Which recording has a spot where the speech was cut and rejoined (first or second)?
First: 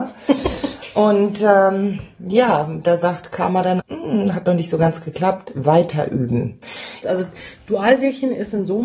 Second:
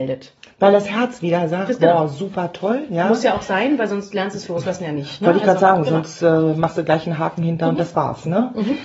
first